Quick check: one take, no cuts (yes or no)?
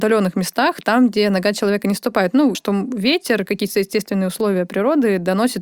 no